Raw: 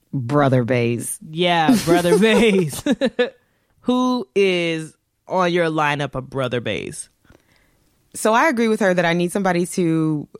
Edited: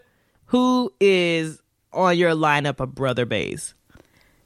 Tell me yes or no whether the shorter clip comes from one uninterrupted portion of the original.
yes